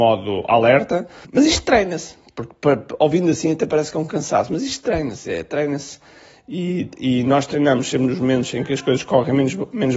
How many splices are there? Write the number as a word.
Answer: zero